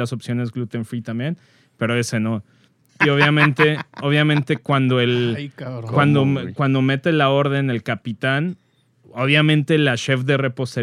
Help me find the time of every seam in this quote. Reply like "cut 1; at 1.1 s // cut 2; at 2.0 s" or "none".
cut 1; at 2.9 s